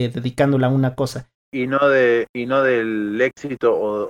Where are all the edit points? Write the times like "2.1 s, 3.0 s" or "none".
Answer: 1.3 s